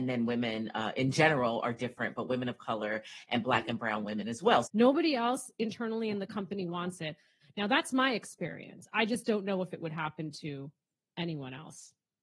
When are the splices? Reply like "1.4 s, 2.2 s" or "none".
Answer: 4.6 s, 7.4 s